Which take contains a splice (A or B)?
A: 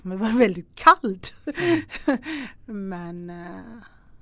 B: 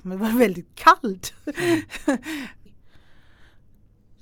B